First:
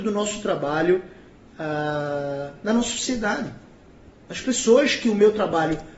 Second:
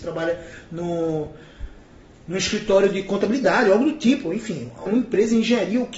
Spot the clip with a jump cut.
second; 1 cut; at 4.9 s

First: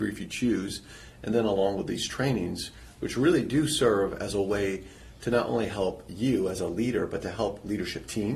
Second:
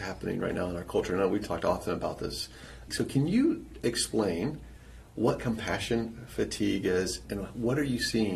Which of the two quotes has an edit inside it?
second; 2 cuts; at 2.9 s, 7.2 s

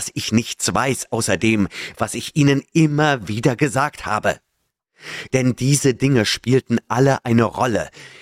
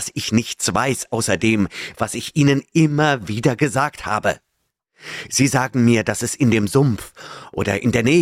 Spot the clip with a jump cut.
first; 1 cut; at 5.3 s

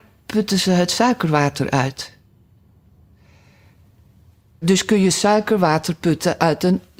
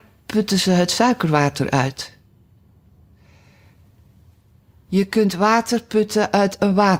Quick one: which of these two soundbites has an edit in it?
first; 1 cut; at 4.6 s

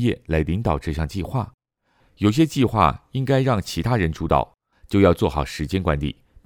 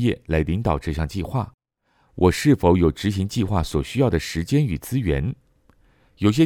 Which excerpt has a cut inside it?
first; 2 cuts; at 2.0 s, 4.7 s

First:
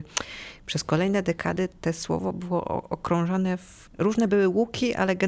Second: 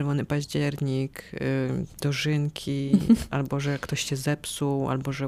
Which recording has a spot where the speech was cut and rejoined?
first; 1 cut; at 3.9 s

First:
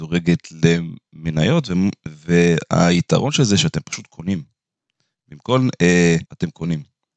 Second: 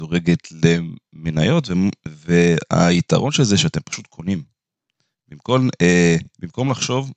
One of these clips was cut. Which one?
first; 1 cut; at 6.3 s

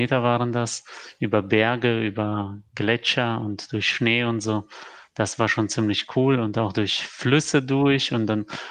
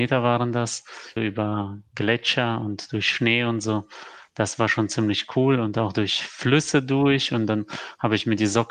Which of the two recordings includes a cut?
second; 1 cut; at 1.2 s

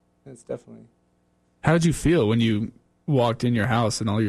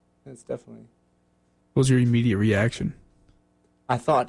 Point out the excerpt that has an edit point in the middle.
second; 1 cut; at 1.6 s

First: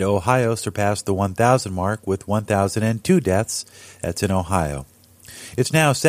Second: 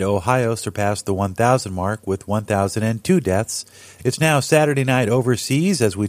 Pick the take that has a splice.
second; 1 cut; at 4.0 s

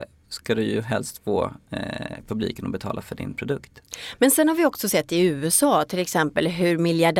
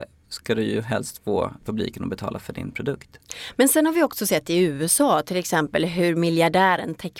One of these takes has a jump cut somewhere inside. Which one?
second; 1 cut; at 1.6 s

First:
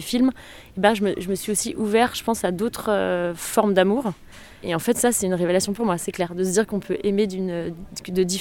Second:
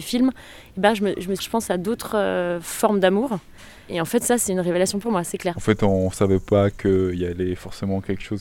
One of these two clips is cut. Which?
second; 2 cuts; at 1.4 s, 5.5 s

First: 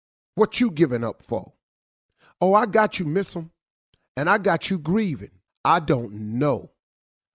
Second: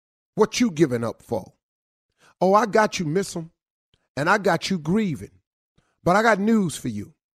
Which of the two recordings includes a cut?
first; 1 cut; at 5.5 s

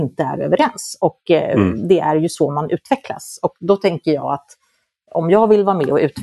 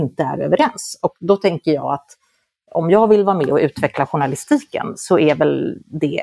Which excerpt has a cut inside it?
second; 1 cut; at 1.0 s

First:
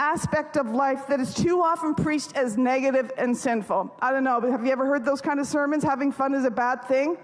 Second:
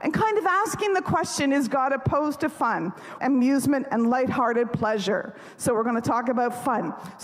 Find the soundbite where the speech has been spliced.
second; 1 cut; at 3.2 s

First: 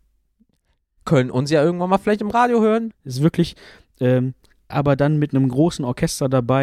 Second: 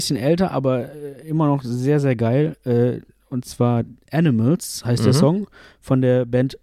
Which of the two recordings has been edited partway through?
first; 2 cuts; at 2.9 s, 4.7 s

